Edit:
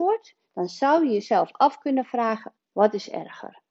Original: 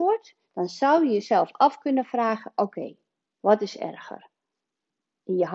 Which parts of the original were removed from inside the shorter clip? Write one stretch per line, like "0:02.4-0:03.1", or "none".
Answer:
0:02.6-0:03.2